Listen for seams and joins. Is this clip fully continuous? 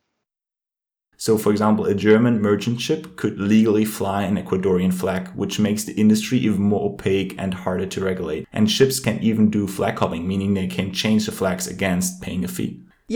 no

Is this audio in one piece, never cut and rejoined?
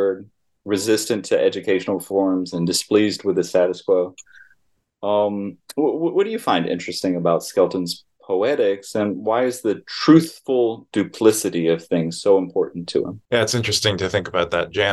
yes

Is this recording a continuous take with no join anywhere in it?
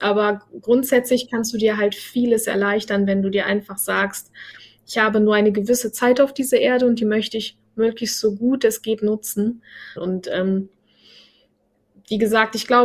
no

